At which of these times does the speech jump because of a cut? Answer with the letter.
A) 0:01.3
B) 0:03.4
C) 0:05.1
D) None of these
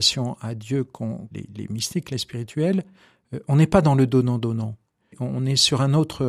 D